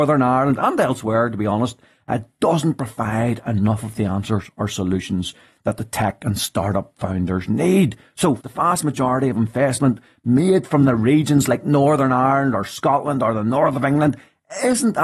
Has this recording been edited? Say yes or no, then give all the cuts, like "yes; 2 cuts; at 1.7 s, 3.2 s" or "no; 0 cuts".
yes; 1 cut; at 8.4 s